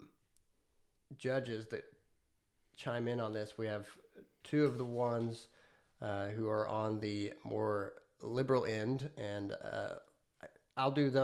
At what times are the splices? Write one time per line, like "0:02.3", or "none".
none